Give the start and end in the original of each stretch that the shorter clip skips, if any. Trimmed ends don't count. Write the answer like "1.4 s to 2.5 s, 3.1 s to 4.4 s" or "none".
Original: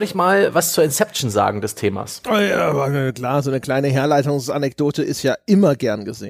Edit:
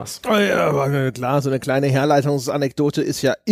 none